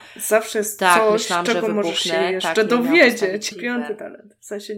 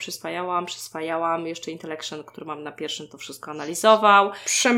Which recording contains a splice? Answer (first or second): first